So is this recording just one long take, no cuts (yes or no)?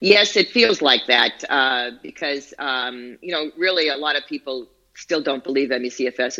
yes